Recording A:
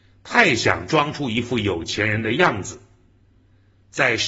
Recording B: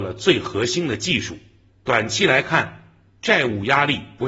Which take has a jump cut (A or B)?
B